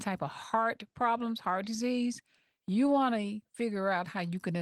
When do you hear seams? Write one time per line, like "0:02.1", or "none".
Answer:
none